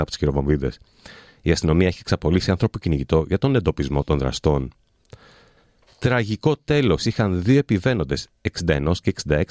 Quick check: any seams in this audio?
no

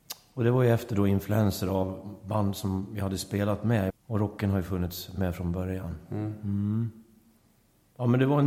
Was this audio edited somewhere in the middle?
yes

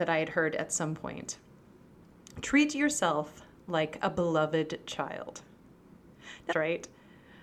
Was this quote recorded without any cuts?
no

